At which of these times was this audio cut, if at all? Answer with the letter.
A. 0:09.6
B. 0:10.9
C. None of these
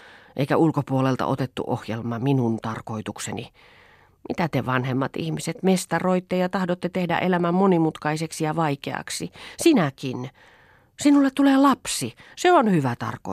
C